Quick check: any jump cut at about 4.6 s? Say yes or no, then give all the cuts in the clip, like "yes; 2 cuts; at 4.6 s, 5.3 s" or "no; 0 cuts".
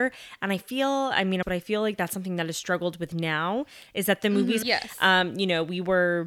yes; 2 cuts; at 1.4 s, 4.6 s